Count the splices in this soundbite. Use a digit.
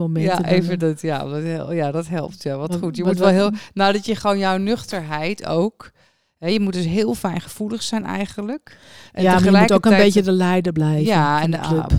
0